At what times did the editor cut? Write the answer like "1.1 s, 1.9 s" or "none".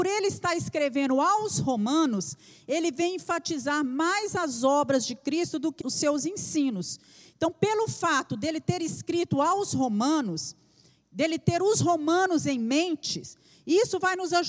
5.8 s